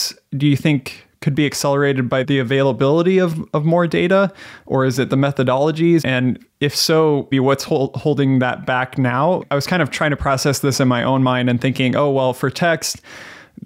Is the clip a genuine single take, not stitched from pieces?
no; 2 cuts; at 6.0 s, 7.3 s

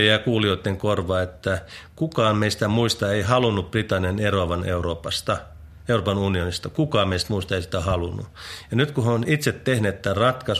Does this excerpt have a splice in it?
no; 0 cuts

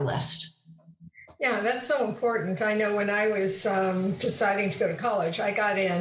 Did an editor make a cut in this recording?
no; 0 cuts

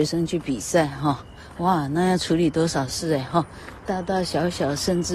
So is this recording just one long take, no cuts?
yes; 0 cuts

